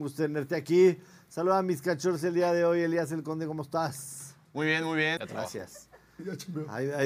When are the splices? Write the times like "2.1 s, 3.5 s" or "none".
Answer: 5.2 s